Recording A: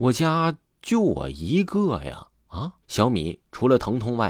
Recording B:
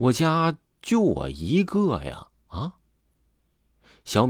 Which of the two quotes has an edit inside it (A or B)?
A